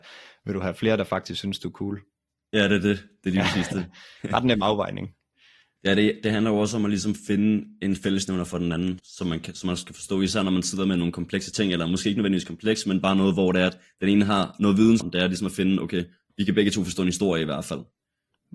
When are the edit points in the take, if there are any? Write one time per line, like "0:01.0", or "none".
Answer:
0:05.8
0:09.0
0:15.0